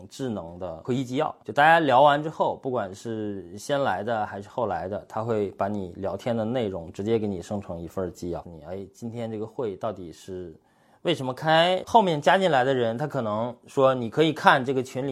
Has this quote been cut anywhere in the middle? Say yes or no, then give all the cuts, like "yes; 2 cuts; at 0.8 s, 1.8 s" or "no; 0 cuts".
yes; 2 cuts; at 8.4 s, 11.8 s